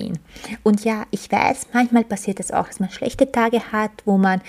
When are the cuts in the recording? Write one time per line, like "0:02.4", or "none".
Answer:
none